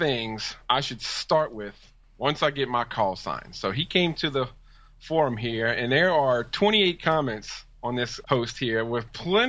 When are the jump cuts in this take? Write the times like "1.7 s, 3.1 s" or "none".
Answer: 8.2 s